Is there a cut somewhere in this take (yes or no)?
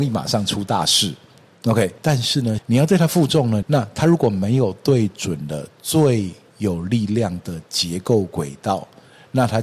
yes